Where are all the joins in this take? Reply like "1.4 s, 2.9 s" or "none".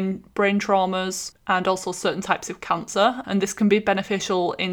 1.3 s, 3.2 s